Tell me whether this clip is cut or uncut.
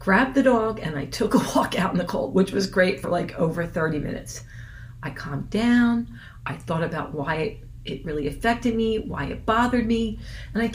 uncut